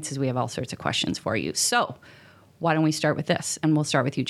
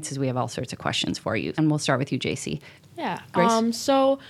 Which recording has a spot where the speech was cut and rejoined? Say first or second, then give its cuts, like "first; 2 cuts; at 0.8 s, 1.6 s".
second; 2 cuts; at 1.5 s, 2.8 s